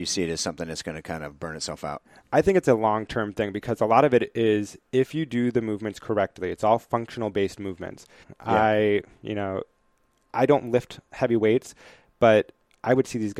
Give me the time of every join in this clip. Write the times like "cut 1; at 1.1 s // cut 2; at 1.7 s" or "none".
cut 1; at 8.2 s